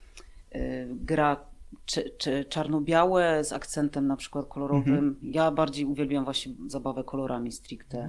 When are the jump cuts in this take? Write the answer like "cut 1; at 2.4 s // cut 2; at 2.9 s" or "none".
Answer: none

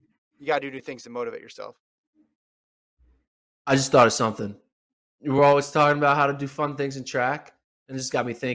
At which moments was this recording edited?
none

